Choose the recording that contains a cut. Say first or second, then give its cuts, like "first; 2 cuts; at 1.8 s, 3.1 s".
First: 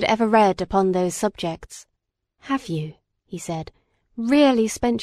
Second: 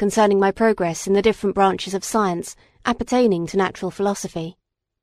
first; 1 cut; at 2.2 s